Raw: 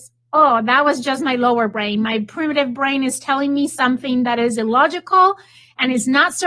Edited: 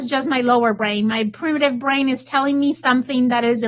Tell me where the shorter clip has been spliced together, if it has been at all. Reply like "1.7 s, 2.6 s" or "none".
none